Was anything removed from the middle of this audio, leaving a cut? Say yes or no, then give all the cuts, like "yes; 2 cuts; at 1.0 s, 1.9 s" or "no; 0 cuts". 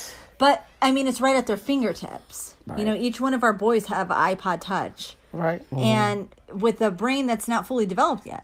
yes; 1 cut; at 5.7 s